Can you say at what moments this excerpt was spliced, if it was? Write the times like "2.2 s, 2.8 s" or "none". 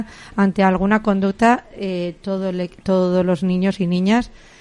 none